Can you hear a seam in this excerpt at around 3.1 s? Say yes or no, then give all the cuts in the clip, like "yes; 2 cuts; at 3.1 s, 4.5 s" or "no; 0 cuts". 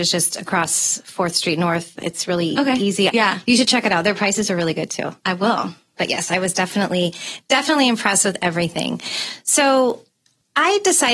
yes; 1 cut; at 3.1 s